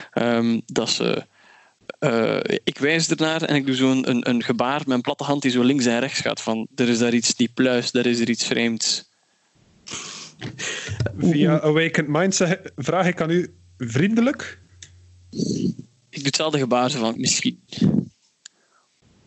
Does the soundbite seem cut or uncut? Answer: cut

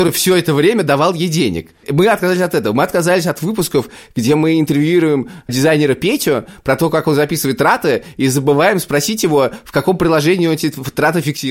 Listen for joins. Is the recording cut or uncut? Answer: cut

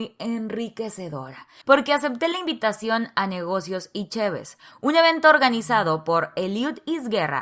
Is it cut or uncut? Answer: cut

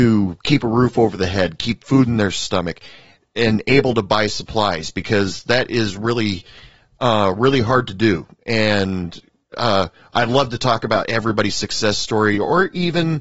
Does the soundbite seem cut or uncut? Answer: uncut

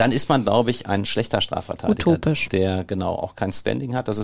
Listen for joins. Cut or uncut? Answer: uncut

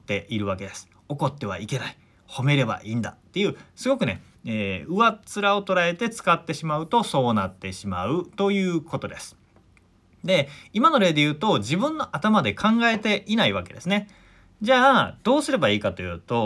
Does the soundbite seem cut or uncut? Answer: uncut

